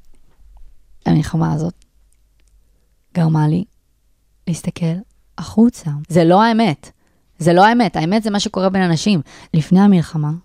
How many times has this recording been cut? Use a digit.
2